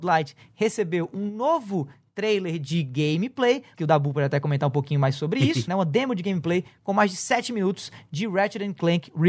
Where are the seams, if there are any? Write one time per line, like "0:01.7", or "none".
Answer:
0:03.8
0:05.7